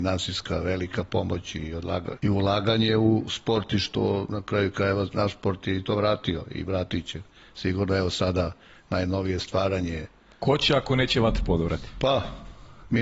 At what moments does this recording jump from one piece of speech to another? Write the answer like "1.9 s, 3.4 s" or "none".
2.2 s

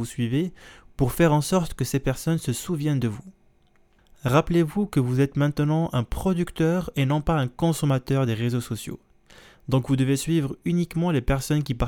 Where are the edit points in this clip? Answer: none

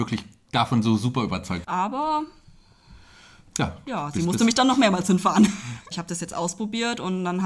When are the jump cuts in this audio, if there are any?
1.6 s, 5.9 s

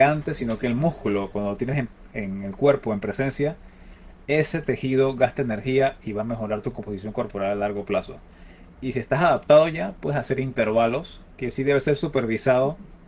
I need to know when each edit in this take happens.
none

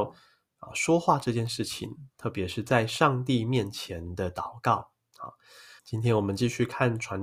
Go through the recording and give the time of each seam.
5.8 s

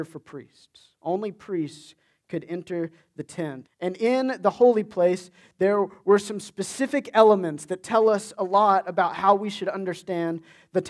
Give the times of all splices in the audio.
3.6 s

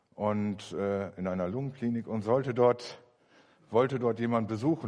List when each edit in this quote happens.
none

